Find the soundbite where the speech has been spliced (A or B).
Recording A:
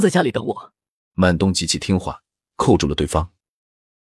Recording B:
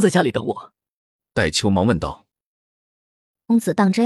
A